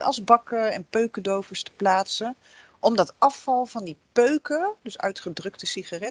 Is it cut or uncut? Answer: uncut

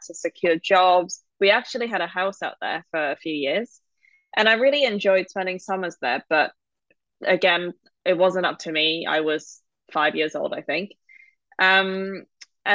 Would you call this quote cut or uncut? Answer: uncut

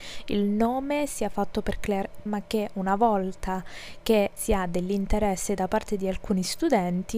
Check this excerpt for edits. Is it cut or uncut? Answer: cut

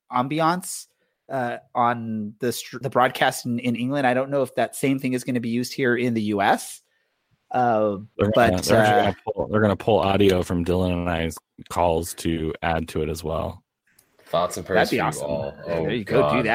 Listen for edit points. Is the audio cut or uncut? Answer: cut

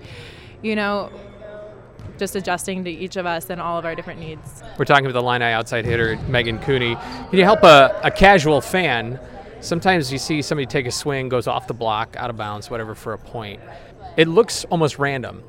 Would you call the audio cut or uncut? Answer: cut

